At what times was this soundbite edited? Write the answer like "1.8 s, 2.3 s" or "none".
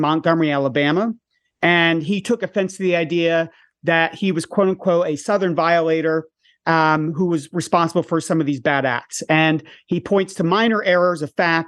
none